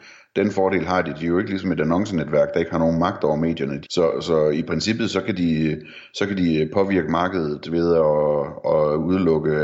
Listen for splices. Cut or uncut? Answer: cut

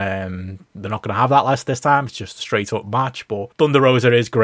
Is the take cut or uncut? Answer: cut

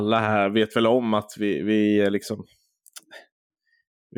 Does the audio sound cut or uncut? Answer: uncut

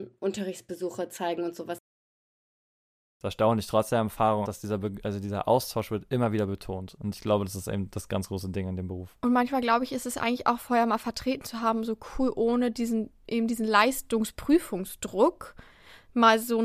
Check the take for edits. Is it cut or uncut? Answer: cut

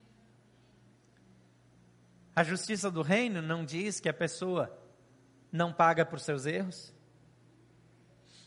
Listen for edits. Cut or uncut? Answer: uncut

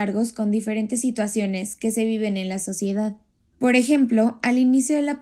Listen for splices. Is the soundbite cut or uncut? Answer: uncut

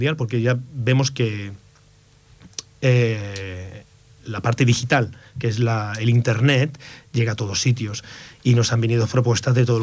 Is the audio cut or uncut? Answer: uncut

